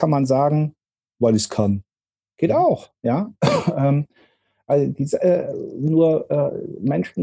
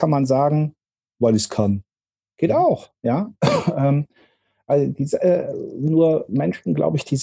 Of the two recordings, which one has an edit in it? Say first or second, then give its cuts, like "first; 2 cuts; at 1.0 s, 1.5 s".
second; 1 cut; at 6.3 s